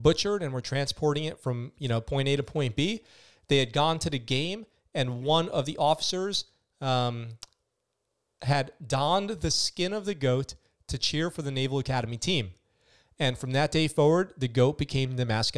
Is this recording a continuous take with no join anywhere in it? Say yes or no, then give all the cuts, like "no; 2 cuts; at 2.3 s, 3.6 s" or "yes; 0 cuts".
yes; 0 cuts